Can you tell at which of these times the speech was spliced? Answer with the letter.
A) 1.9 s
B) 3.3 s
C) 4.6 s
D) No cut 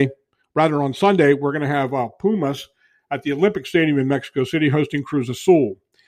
D